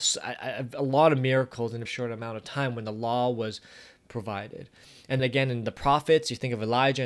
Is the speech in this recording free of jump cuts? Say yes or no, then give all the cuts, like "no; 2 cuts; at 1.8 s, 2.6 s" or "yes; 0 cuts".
no; 2 cuts; at 1.8 s, 5.2 s